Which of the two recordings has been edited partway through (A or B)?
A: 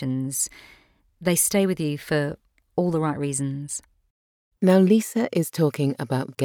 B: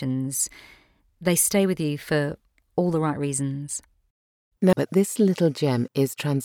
B